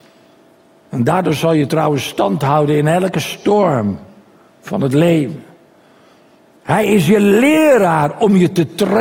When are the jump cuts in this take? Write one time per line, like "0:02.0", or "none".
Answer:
none